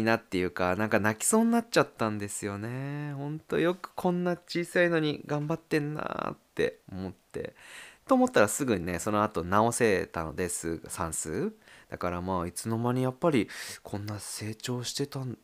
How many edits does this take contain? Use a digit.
1